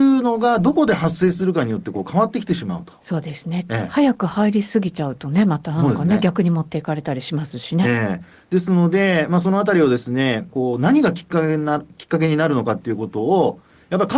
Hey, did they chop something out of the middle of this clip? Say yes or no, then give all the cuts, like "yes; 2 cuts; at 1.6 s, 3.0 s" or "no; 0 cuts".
yes; 1 cut; at 10.5 s